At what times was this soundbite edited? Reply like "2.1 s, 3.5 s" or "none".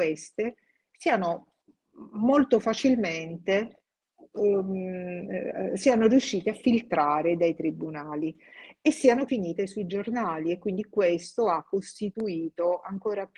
9.3 s

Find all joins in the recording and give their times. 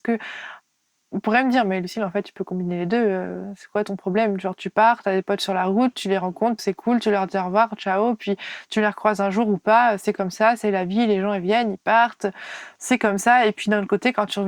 none

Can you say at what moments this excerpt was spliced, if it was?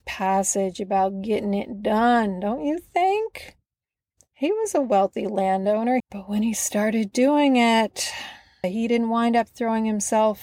6.0 s, 8.6 s

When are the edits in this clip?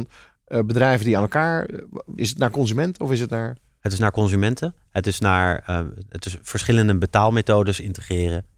2.2 s

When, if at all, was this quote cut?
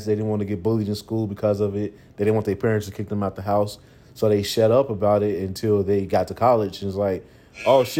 none

